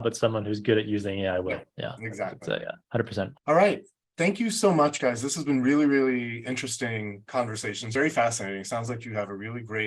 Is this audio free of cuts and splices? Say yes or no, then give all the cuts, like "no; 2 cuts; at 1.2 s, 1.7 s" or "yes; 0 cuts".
yes; 0 cuts